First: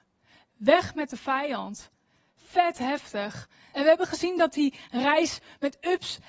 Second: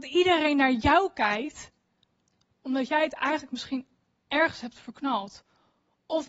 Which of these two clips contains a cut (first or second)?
first